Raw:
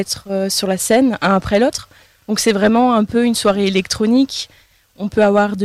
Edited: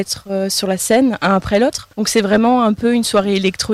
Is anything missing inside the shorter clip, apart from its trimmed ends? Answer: yes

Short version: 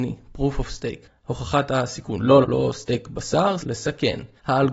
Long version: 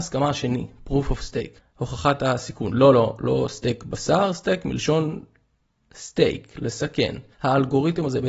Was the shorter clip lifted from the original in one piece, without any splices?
no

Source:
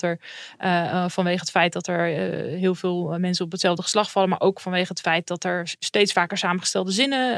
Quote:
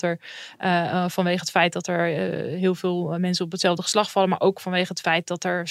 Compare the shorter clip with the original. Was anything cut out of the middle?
no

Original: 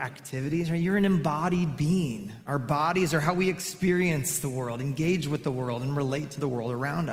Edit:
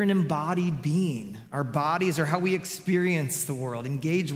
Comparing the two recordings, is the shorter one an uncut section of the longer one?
yes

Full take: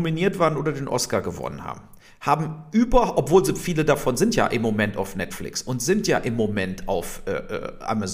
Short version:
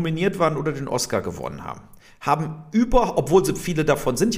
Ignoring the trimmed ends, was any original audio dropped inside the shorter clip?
no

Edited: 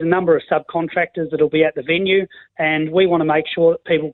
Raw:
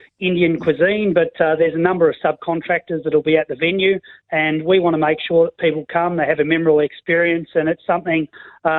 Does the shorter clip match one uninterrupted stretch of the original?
yes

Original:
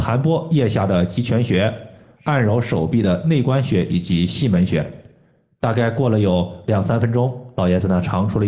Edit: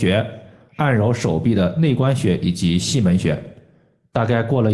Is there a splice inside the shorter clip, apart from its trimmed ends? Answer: no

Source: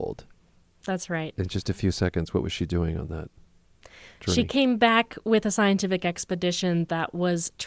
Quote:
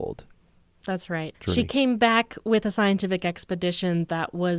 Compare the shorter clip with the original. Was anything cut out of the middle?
yes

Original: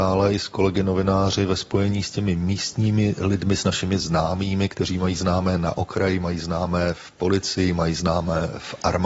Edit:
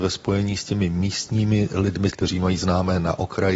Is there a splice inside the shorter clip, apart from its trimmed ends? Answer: yes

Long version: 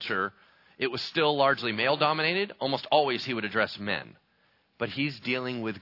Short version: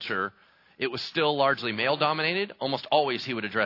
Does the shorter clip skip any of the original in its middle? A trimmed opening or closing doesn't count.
no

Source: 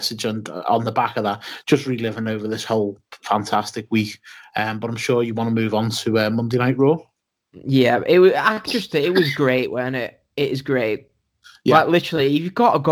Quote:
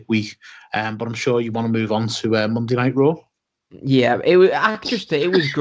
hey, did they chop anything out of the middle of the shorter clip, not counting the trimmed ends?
no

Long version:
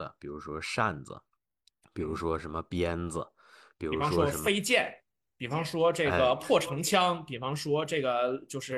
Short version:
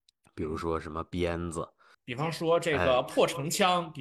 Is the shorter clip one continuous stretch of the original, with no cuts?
no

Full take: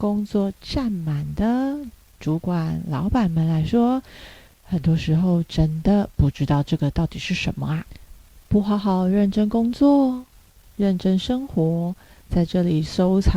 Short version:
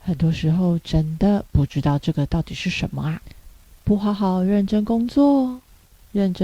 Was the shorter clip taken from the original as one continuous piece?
yes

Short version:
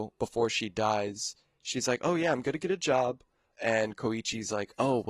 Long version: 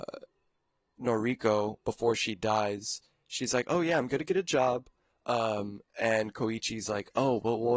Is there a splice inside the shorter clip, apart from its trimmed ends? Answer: yes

